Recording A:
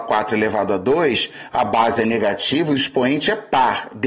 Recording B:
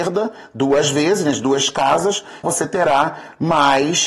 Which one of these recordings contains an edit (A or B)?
B